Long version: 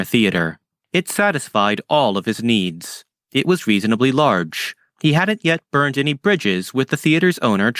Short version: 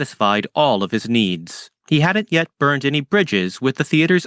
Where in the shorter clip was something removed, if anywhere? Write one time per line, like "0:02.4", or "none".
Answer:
0:01.8